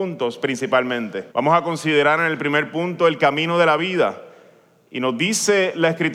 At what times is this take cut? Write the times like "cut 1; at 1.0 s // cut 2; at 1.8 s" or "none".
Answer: cut 1; at 1.3 s